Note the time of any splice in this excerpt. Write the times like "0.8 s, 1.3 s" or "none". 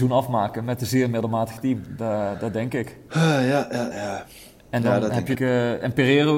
3.9 s, 5.4 s